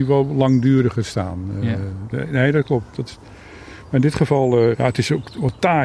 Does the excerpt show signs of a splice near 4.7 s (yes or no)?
yes